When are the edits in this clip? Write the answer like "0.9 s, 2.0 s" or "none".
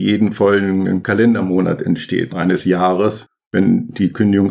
2.3 s